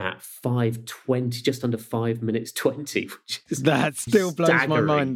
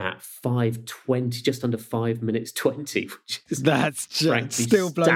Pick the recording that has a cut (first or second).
first